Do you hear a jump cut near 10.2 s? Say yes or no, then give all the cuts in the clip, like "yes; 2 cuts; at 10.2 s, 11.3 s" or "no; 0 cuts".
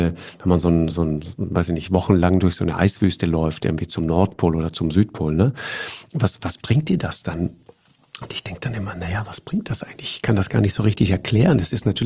no; 1 cut; at 0.9 s